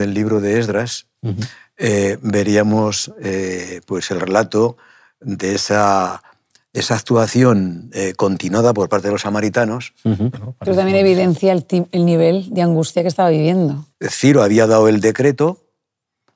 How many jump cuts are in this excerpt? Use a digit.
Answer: 2